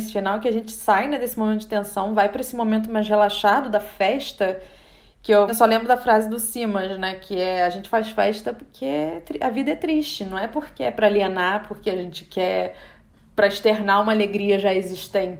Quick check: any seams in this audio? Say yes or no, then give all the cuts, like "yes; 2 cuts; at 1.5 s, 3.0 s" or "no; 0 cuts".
yes; 1 cut; at 5.5 s